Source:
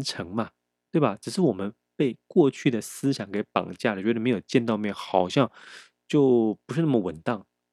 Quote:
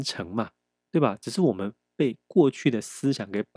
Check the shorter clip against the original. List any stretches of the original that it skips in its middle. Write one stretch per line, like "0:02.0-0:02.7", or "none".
none